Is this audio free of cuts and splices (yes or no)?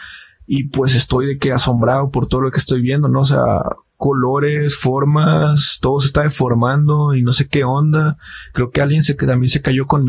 yes